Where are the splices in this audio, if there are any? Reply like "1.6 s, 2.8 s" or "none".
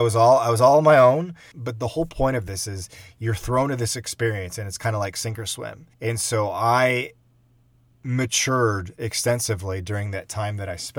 5.9 s

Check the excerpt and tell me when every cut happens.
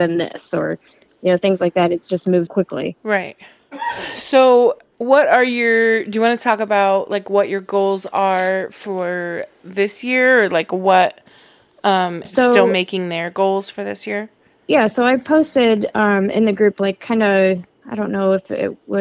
2.5 s, 12.2 s

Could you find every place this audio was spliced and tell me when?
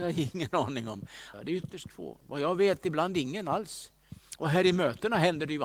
1.3 s

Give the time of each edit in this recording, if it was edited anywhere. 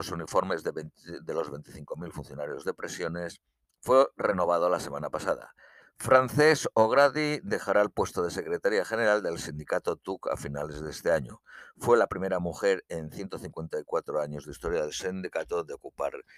5.8 s

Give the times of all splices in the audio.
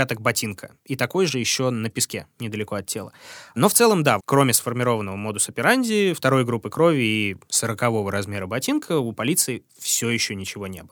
4.2 s

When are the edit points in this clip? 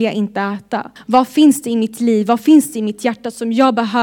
1.0 s

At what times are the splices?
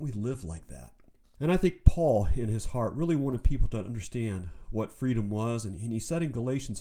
1.4 s

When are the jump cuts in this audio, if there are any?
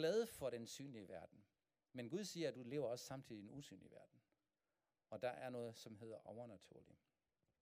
none

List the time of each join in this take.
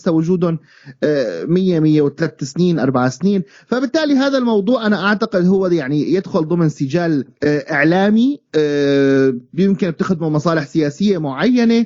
7.3 s

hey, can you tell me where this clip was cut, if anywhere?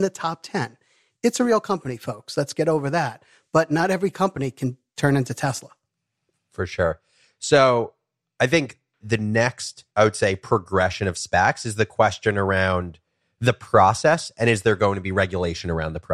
none

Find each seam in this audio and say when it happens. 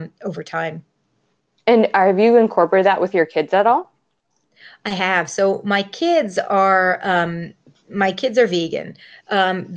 none

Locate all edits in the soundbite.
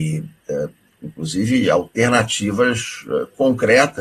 1.0 s

